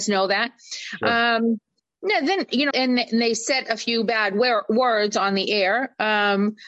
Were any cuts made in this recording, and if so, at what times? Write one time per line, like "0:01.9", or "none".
0:02.7